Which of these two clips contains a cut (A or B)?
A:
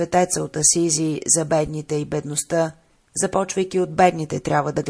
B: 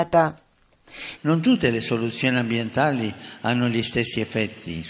B